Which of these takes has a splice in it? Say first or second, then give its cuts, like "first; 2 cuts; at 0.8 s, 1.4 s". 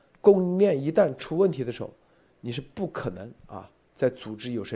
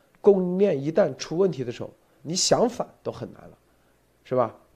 second; 1 cut; at 2.2 s